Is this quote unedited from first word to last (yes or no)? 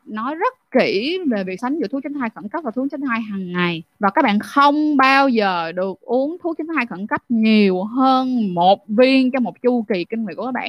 no